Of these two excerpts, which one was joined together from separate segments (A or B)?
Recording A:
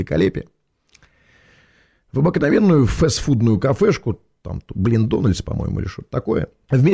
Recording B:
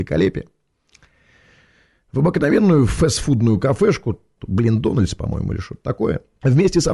B